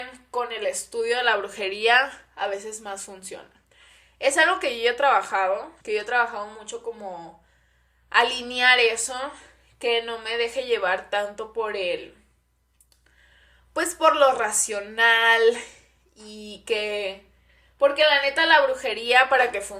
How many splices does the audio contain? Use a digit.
1